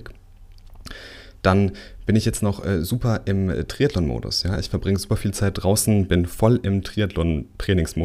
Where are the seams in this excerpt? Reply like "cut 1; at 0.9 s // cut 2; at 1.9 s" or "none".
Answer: none